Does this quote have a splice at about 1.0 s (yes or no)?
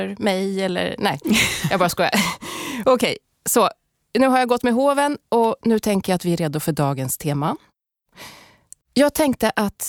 no